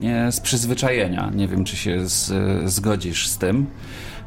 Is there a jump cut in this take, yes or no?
no